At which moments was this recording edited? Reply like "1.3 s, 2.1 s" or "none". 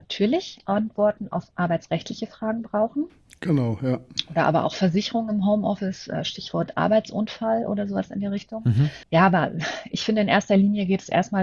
9.0 s